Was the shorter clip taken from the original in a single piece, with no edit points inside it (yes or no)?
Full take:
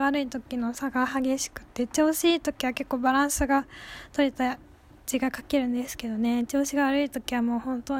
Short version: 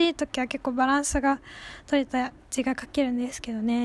no